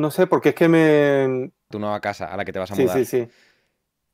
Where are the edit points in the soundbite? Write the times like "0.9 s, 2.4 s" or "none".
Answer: 1.7 s